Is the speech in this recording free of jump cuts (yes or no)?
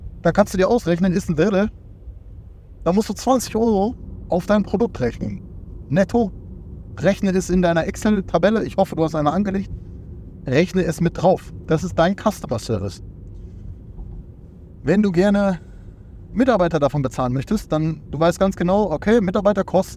yes